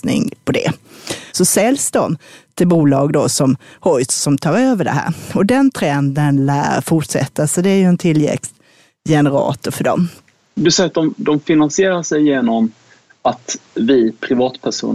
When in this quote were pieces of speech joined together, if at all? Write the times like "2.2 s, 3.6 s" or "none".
1.3 s

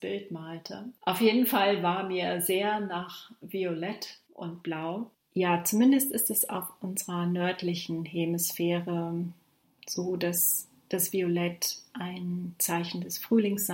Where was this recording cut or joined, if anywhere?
1.0 s, 5.1 s

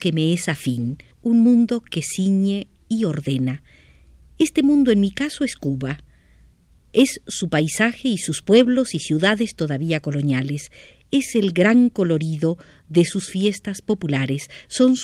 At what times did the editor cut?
1.1 s

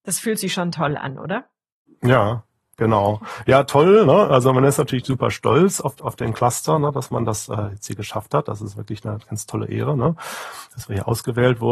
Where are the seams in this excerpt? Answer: none

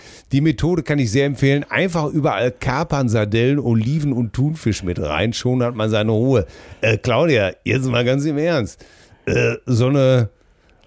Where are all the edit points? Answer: none

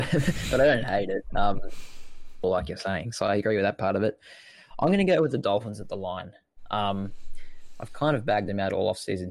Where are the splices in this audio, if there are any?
2.4 s

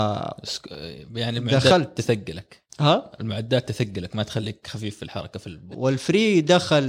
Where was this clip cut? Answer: 5.7 s

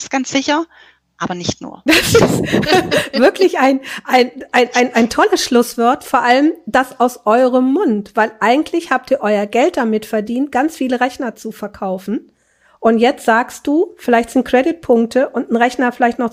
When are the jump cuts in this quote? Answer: 1.9 s

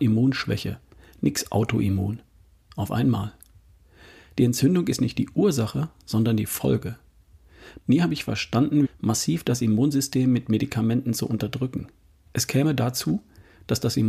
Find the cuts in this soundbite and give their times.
7.8 s, 8.8 s, 12.3 s

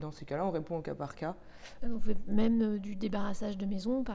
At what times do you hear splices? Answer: 1.8 s

